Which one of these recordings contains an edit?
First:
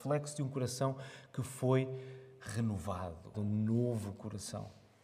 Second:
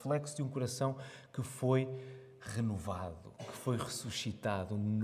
first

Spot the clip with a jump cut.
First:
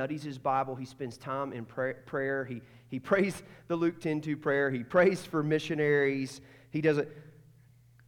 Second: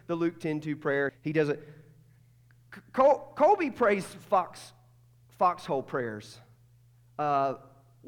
second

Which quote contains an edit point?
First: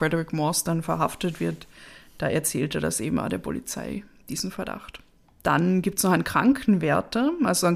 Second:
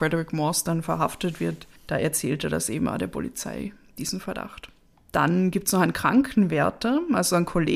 second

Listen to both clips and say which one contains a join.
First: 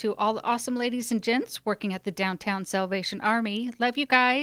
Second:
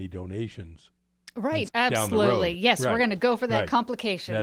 second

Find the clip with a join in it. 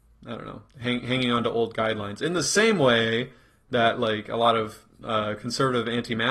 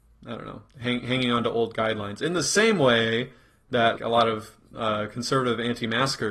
second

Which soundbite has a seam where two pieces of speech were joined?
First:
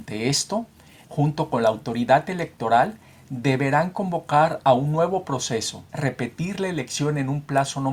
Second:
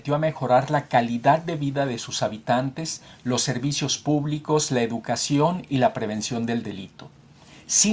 first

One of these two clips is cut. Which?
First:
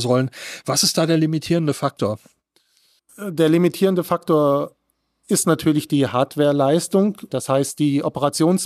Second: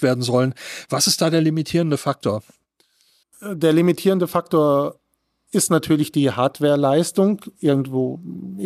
first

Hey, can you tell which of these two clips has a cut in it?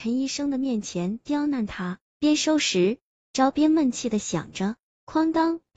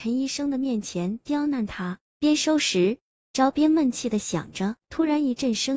second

